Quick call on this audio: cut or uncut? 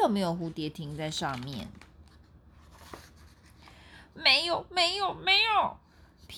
uncut